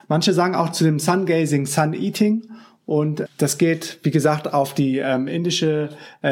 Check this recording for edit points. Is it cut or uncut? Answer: cut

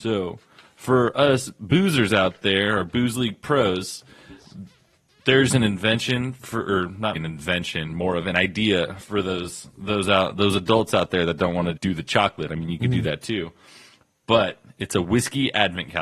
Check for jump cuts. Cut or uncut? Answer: cut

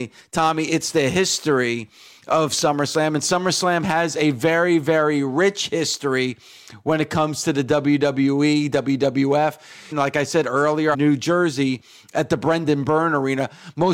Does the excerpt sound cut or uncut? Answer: cut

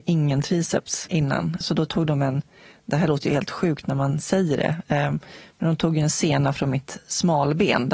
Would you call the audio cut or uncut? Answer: cut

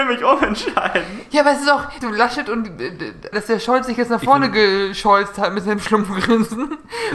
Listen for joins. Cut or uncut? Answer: cut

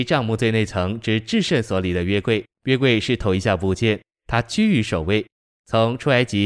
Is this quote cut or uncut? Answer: cut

